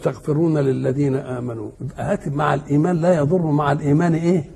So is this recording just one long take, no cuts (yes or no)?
no